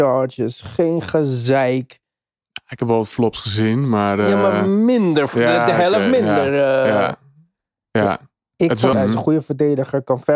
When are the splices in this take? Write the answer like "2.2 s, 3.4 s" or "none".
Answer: 8.9 s